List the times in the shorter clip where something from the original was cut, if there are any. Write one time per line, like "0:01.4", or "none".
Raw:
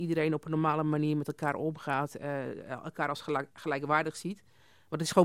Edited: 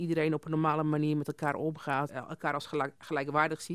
0:02.1